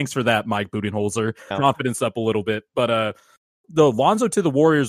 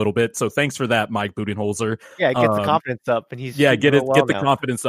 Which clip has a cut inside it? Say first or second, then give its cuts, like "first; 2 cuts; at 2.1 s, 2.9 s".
first; 2 cuts; at 1.5 s, 3.6 s